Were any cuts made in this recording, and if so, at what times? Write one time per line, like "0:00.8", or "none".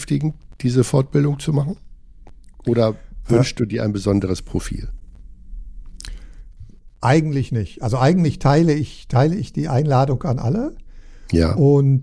none